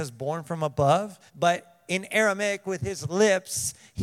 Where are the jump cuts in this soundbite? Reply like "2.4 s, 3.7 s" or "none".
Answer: 1.3 s

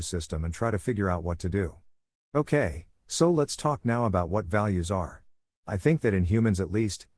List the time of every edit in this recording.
2.2 s

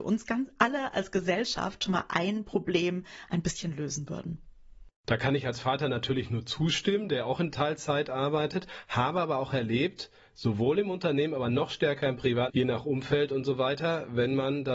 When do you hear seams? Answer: 12.5 s

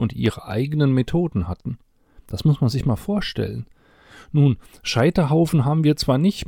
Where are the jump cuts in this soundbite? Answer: none

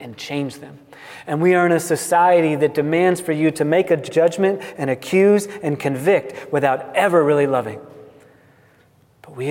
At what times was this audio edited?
none

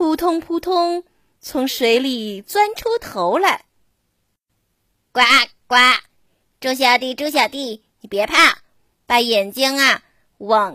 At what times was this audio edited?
none

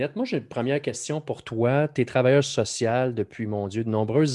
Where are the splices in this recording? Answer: none

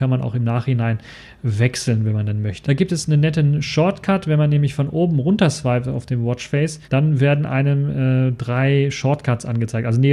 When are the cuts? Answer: 2.6 s, 6.8 s

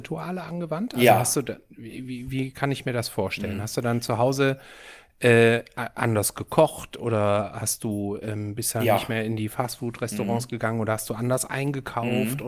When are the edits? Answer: none

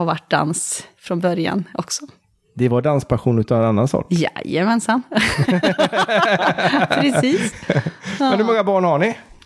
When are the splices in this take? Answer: none

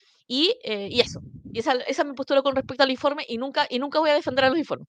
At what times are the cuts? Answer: none

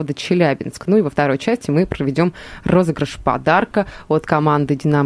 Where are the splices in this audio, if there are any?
none

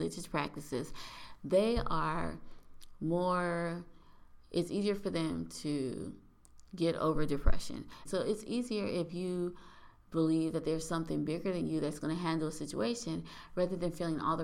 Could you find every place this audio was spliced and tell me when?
8.1 s

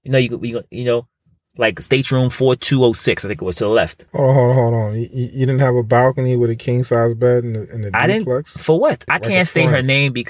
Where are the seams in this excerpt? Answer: 4.1 s, 9.1 s

